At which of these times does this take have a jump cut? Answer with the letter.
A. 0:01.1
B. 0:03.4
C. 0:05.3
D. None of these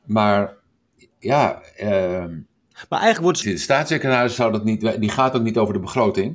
B